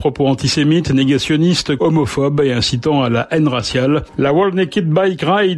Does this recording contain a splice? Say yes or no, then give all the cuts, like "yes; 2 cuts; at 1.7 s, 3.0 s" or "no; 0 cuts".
yes; 2 cuts; at 1.8 s, 4.1 s